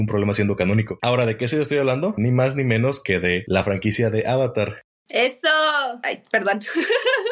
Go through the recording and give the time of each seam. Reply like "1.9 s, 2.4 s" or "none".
none